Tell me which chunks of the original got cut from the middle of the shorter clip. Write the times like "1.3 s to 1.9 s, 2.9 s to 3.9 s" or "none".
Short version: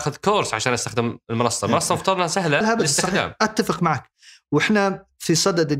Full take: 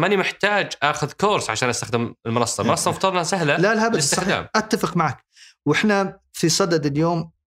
3.6 s to 3.7 s